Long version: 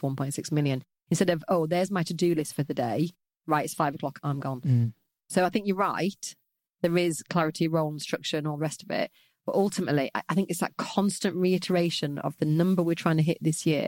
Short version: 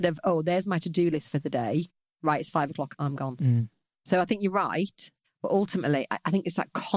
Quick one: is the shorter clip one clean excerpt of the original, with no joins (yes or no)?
no